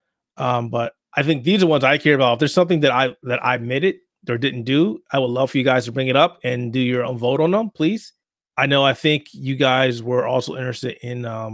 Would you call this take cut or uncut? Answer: uncut